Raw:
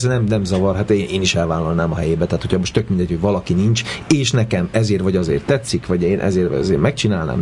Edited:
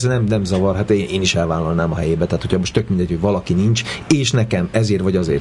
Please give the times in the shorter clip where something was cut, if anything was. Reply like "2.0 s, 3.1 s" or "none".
none